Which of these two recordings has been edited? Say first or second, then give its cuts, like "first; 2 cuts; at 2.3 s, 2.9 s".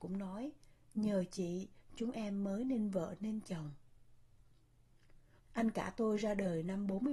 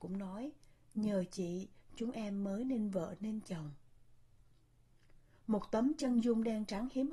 first; 1 cut; at 5.4 s